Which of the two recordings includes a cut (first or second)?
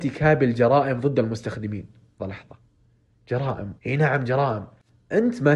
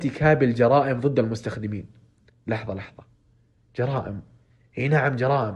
first